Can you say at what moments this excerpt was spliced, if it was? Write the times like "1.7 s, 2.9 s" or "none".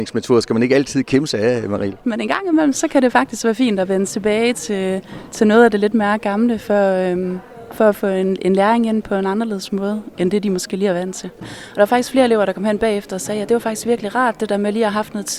2.0 s, 11.4 s